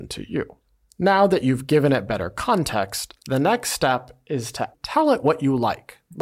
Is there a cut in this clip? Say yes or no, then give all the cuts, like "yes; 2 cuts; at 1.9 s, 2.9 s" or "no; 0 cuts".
yes; 1 cut; at 4.7 s